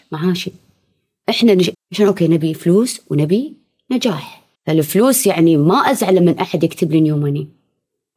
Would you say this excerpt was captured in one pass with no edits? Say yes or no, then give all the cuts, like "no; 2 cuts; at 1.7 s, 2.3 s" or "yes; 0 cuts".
no; 2 cuts; at 1.7 s, 4.5 s